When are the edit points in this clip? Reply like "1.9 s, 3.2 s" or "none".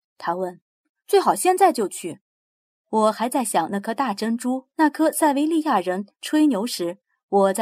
2.8 s, 4.7 s